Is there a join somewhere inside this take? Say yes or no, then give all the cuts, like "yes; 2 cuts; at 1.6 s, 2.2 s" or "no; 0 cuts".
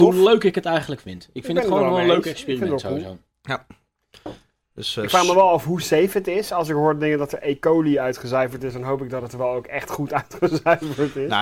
no; 0 cuts